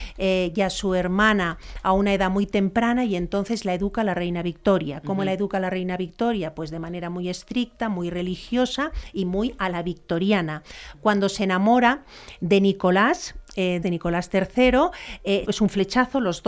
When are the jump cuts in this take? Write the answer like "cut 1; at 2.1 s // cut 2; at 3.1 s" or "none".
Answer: cut 1; at 13.8 s // cut 2; at 15.4 s